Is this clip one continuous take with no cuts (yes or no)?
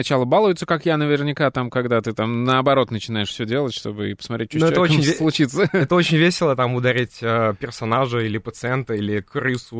yes